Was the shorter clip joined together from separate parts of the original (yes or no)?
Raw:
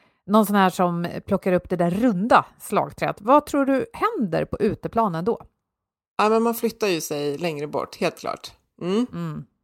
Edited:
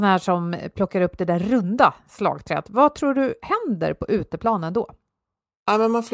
no